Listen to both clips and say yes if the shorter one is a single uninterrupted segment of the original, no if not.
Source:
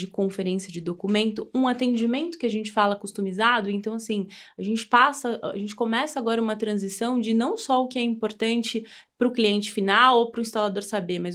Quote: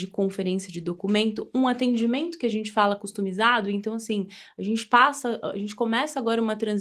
yes